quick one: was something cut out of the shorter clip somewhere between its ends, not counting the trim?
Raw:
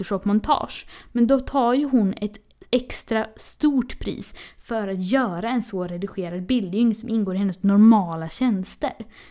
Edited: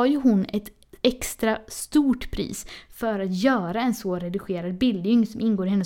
no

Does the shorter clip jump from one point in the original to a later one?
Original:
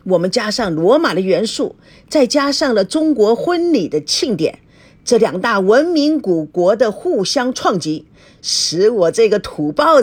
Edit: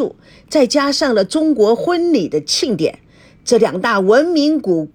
no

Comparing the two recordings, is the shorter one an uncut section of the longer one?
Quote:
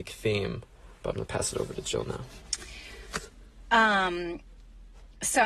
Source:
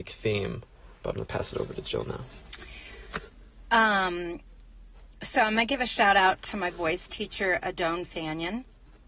yes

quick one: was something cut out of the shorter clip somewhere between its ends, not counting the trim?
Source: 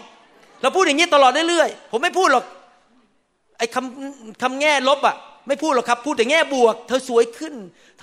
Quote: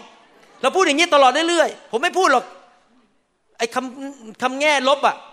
no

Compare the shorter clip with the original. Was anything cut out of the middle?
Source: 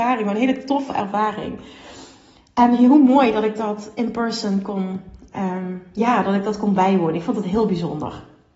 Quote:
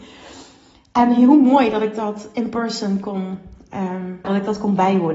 yes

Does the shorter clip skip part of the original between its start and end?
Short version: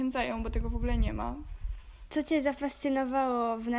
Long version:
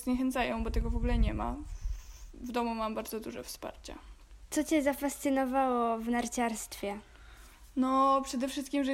yes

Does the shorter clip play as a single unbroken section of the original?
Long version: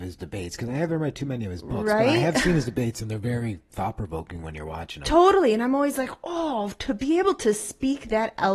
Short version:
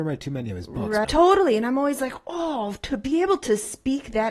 no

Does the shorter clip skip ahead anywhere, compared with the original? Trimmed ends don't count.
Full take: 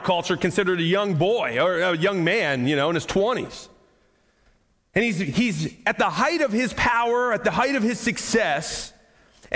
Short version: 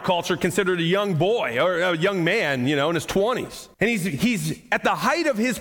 yes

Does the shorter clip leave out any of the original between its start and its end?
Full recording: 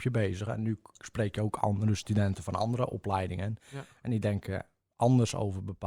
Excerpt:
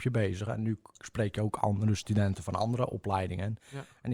no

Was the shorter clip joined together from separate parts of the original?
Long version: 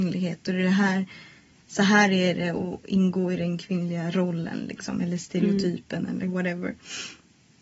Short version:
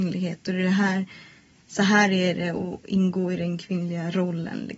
no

